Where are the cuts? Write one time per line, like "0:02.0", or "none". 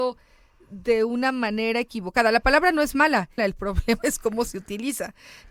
0:03.4

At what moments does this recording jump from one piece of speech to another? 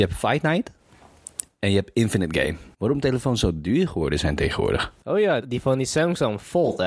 0:02.7
0:05.4

